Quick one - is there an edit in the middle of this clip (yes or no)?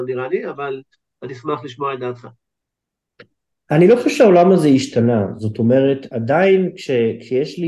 no